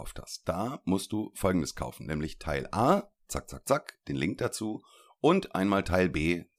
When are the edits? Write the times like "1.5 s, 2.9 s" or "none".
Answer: none